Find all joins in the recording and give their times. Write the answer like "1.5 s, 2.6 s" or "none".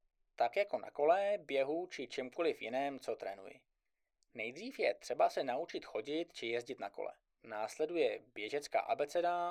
none